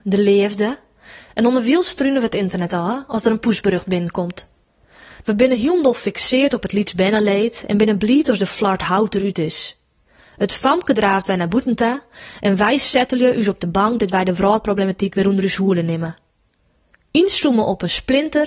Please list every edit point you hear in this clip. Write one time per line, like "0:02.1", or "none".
0:05.2